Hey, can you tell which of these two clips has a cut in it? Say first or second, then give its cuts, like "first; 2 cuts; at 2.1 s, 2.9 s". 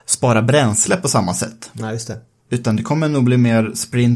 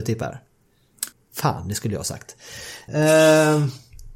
second; 2 cuts; at 1.1 s, 2.9 s